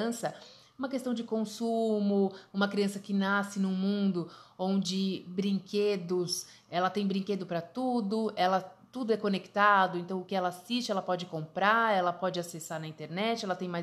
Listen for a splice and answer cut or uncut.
uncut